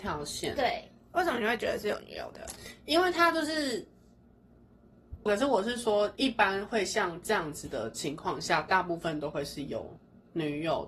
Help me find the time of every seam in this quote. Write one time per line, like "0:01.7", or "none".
0:05.3